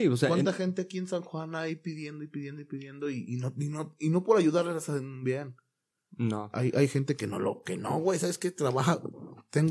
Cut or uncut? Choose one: uncut